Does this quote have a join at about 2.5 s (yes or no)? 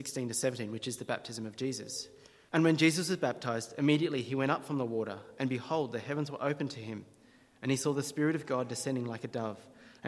yes